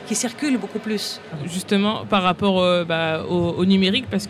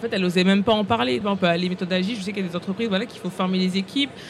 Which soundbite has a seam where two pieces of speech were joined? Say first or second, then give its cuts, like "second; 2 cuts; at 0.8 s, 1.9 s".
second; 1 cut; at 1.2 s